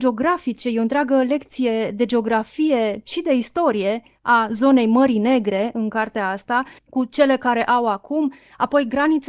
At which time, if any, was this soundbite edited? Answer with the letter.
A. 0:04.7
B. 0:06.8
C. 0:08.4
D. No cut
B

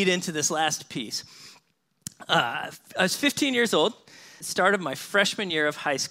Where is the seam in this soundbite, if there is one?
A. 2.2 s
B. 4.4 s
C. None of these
B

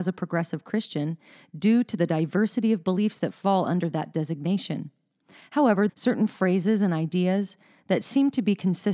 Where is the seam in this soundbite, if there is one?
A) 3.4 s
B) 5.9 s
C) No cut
B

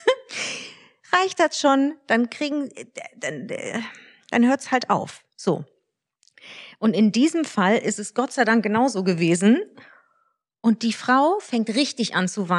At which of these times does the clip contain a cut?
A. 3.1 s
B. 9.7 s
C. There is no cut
B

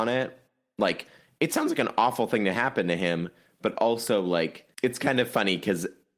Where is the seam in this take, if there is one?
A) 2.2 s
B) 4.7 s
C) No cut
B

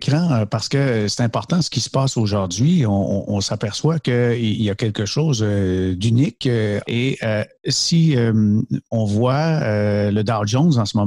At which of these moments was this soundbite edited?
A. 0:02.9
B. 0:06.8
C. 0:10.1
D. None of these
B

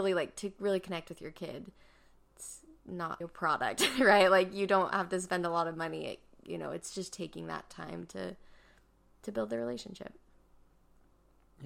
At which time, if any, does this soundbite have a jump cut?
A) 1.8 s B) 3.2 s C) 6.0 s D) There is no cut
B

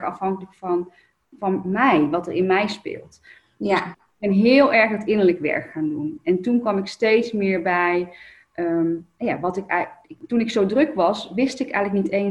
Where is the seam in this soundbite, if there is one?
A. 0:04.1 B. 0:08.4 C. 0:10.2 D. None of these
C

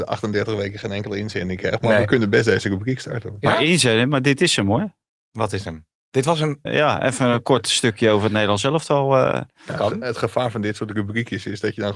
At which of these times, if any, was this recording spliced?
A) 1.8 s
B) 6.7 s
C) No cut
B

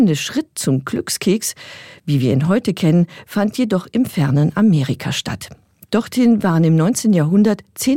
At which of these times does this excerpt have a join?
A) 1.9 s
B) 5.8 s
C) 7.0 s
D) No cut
D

